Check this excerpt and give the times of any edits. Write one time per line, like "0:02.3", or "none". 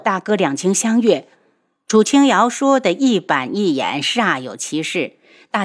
0:01.3